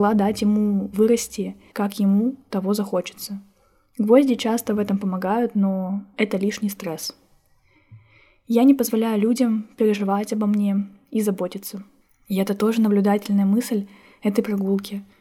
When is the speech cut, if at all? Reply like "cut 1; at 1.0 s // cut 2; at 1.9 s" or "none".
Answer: cut 1; at 1.7 s